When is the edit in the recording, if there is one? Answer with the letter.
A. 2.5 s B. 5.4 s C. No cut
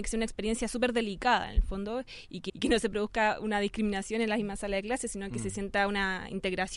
A